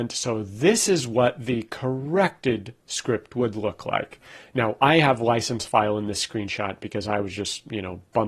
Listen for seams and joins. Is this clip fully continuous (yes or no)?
yes